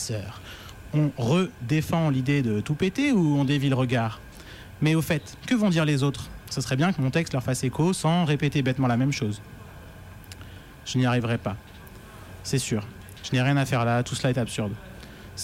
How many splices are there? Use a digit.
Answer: 0